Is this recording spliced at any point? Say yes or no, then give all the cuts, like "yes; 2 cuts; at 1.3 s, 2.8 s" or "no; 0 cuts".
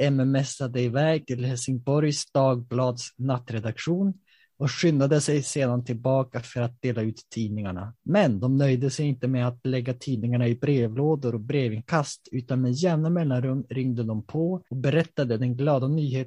yes; 2 cuts; at 8.0 s, 14.7 s